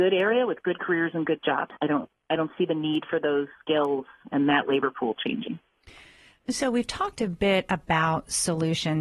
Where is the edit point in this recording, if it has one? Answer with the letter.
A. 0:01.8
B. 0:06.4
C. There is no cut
A